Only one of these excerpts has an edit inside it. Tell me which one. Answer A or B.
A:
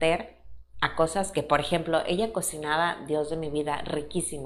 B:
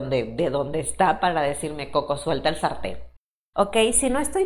B